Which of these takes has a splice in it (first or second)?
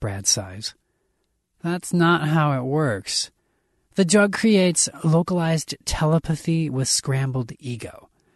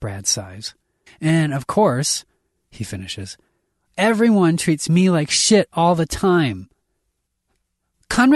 second